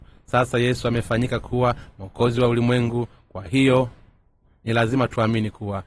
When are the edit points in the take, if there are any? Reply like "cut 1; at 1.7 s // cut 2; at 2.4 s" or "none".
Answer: none

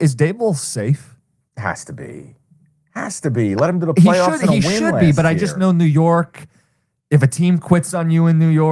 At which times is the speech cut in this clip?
none

